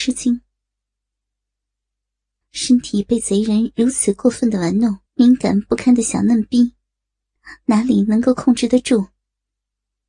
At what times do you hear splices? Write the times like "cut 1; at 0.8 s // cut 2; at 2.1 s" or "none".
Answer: cut 1; at 2.4 s // cut 2; at 5.1 s